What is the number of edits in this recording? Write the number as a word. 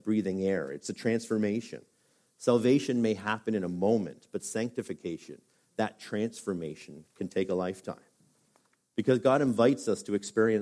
zero